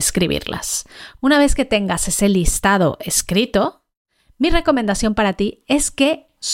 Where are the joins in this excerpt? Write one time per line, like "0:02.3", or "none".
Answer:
0:01.2